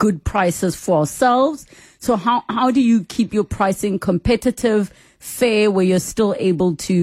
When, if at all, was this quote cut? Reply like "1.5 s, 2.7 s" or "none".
none

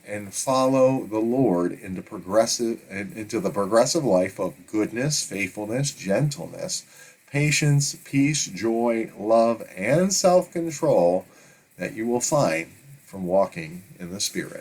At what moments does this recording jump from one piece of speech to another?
none

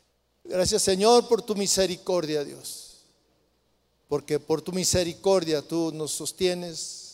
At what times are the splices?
3.9 s

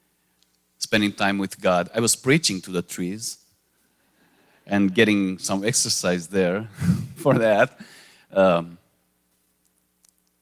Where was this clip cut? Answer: none

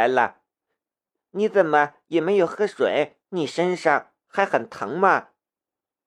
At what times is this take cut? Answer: 1.2 s, 3.2 s

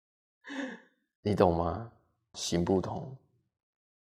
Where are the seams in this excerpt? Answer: 2.3 s

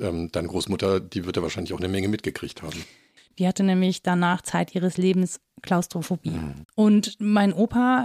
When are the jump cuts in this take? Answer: 3.2 s, 6.7 s

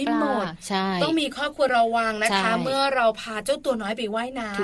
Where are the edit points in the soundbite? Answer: 1.7 s

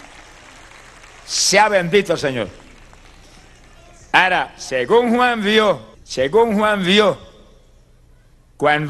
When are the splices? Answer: 5.9 s

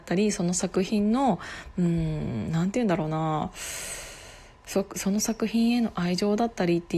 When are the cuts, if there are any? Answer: none

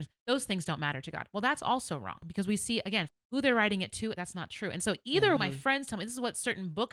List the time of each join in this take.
3.1 s, 4.1 s, 5.4 s

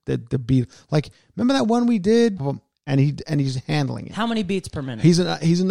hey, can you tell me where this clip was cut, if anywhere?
2.4 s

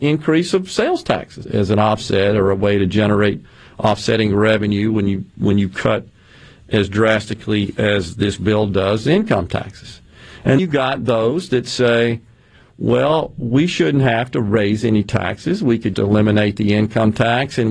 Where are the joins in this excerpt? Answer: 1.4 s, 10.6 s, 15.9 s

